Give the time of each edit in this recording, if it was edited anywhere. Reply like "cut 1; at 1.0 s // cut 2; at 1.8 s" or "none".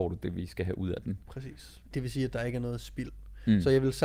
cut 1; at 1.9 s